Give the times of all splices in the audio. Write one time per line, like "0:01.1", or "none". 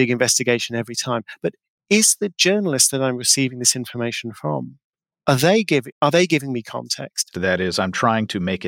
0:05.9
0:07.3